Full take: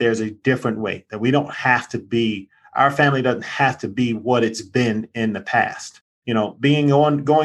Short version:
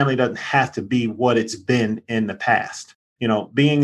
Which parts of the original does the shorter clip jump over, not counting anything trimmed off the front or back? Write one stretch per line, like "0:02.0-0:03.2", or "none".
none